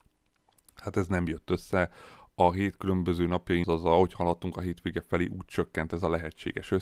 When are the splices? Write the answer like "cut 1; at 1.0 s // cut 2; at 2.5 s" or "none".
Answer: cut 1; at 3.6 s